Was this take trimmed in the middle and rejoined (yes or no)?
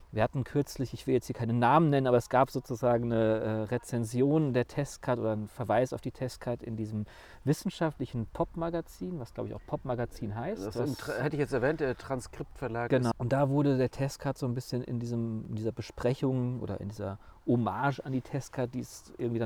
yes